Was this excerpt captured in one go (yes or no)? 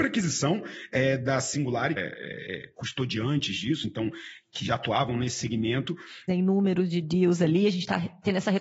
no